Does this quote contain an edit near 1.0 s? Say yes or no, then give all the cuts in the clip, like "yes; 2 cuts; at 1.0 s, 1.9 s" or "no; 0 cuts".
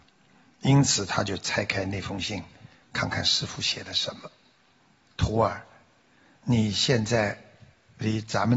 no; 1 cut; at 5.1 s